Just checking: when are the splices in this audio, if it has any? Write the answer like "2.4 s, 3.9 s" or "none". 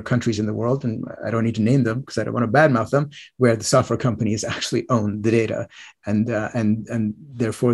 none